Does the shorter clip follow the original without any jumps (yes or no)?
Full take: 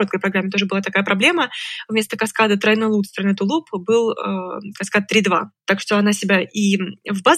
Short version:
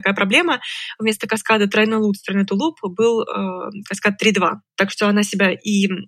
yes